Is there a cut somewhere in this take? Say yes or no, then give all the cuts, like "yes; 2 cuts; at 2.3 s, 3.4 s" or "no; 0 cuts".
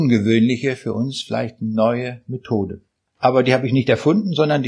no; 0 cuts